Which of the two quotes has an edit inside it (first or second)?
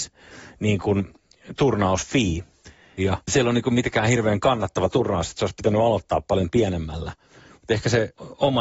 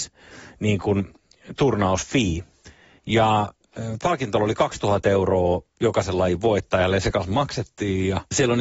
first